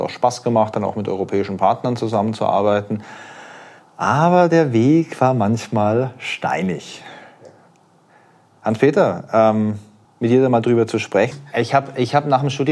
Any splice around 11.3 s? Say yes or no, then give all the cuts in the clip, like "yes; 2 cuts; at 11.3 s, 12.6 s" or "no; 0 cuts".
yes; 2 cuts; at 10.0 s, 11.3 s